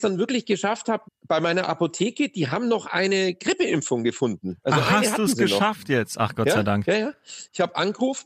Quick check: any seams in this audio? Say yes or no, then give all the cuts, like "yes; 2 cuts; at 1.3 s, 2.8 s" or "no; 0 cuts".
yes; 1 cut; at 1.0 s